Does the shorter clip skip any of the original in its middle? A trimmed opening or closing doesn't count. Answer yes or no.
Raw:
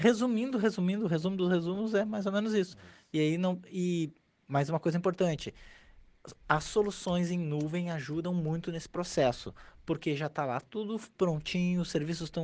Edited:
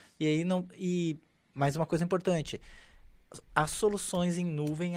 no